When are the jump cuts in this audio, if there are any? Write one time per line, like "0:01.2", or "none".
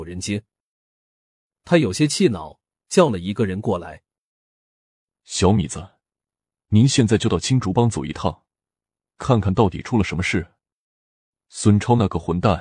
0:02.8